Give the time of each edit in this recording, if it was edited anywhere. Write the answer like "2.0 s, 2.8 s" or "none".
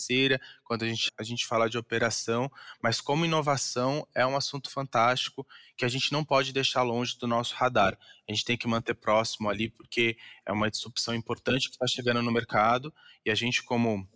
1.1 s